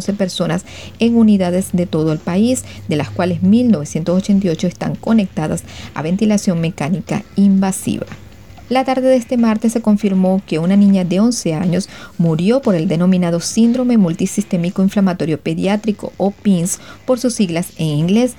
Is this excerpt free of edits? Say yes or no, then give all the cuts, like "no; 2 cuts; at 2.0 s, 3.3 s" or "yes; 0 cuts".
no; 1 cut; at 8.7 s